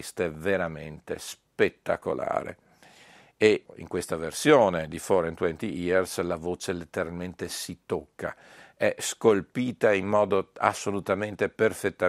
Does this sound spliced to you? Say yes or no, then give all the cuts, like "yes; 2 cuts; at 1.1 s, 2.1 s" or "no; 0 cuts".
no; 0 cuts